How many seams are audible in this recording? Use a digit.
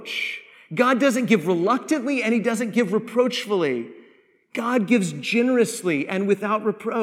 0